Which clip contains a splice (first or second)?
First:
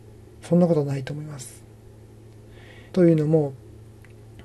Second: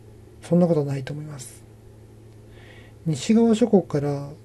first